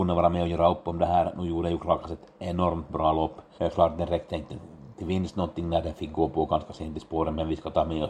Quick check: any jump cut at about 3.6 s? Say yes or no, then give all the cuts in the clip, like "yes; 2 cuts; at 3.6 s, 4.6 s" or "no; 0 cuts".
yes; 1 cut; at 3.6 s